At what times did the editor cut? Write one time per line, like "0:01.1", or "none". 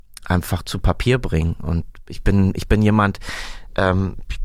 none